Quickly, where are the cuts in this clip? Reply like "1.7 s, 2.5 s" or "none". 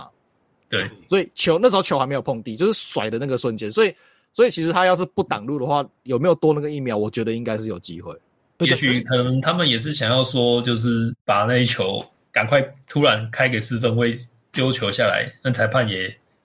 8.6 s, 11.2 s

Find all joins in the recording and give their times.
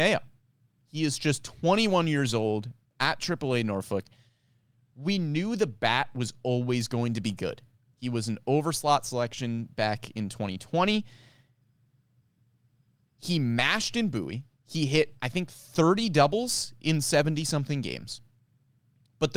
none

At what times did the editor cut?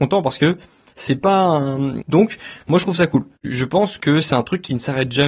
2.0 s

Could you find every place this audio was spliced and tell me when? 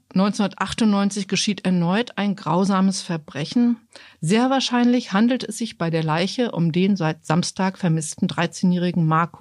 4.1 s

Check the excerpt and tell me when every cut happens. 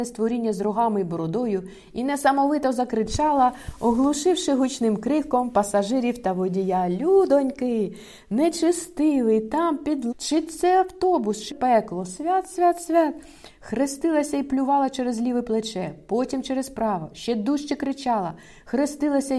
10.1 s, 11.5 s

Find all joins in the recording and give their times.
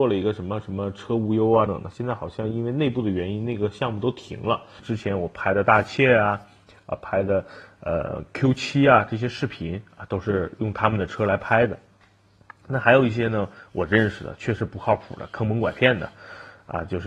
1.7 s, 4.8 s

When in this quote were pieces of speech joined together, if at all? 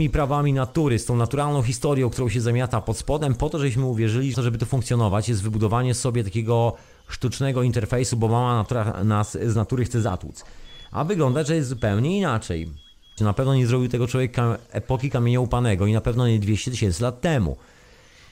4.3 s, 13.2 s

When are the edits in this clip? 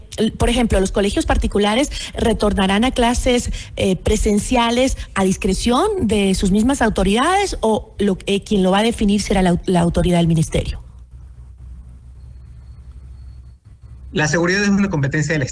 none

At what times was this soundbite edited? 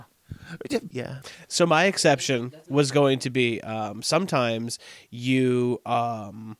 0.9 s

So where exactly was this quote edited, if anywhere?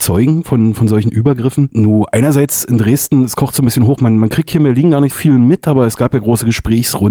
5.1 s

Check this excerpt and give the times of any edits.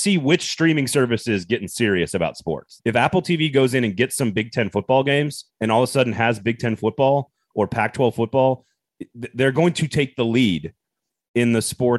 2.8 s, 5.5 s

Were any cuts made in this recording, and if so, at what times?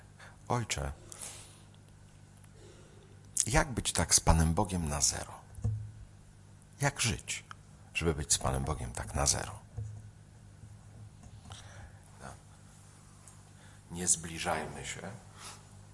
12.0 s

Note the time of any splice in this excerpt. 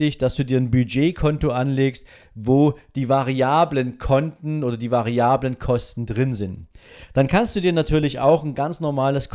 none

